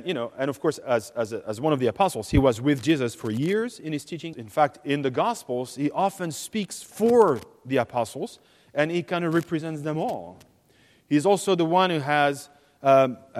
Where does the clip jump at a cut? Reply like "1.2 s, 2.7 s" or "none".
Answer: 4.3 s